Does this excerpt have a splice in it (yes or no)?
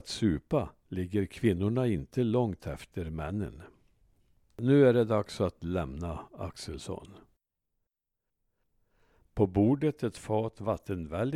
yes